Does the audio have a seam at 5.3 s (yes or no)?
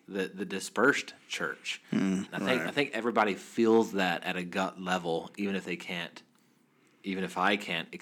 no